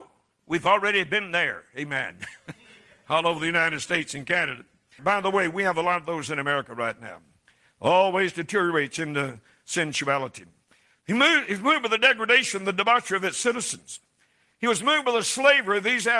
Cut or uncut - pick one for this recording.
cut